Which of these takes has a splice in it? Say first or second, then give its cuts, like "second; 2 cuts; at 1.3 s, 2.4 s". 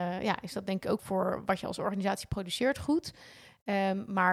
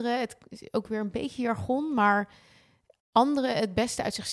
first; 1 cut; at 1.0 s